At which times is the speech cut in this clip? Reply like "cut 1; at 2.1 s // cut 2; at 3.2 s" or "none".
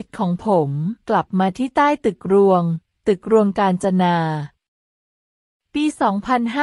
cut 1; at 1.0 s